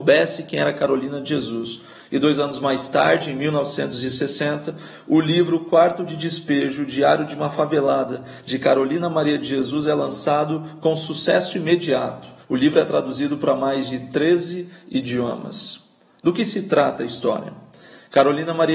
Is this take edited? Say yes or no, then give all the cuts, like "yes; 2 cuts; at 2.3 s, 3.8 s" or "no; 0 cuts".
yes; 1 cut; at 12.4 s